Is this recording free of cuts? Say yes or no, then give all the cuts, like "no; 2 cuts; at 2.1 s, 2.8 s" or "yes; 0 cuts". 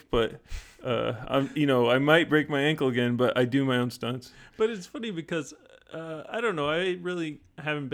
yes; 0 cuts